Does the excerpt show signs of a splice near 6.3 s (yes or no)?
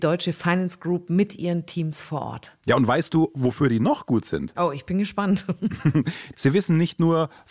yes